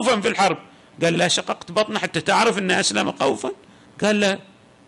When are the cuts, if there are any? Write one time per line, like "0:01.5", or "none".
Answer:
0:01.1